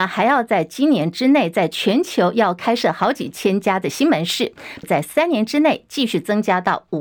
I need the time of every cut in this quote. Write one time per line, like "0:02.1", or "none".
0:04.8